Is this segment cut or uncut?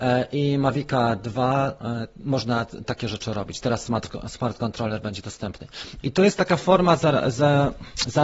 cut